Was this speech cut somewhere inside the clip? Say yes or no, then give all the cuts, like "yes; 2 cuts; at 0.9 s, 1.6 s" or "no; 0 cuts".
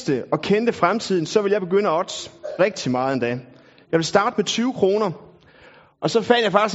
no; 0 cuts